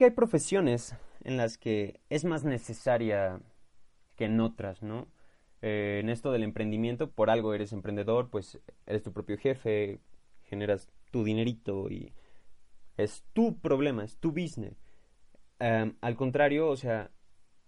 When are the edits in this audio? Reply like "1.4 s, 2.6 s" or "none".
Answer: 7.1 s

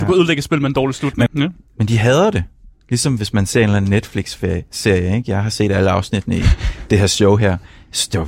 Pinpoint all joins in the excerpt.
1.3 s

